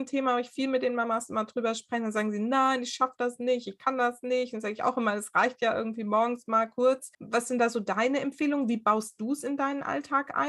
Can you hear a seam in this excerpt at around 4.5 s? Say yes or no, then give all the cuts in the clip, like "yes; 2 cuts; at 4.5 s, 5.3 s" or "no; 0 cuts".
no; 1 cut; at 7.1 s